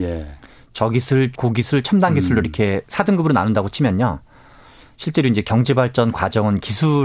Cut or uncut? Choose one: cut